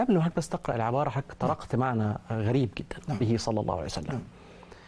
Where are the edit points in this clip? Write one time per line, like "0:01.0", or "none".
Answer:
0:03.2